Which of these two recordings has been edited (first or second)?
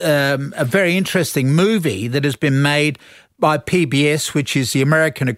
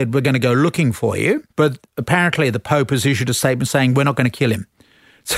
second